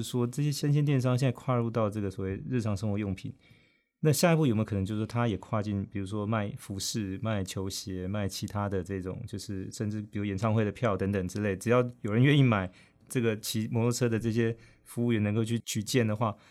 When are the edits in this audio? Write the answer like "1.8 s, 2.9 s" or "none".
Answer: none